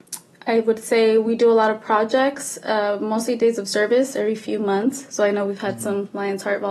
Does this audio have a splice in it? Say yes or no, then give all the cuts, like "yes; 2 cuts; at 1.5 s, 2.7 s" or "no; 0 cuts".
no; 0 cuts